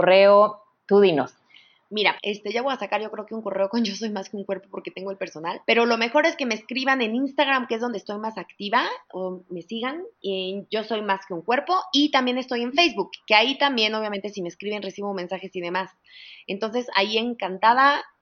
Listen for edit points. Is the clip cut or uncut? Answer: cut